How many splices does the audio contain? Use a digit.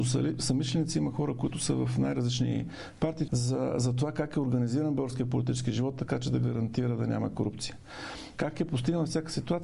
2